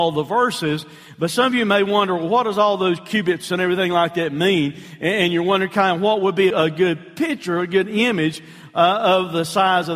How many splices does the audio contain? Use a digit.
1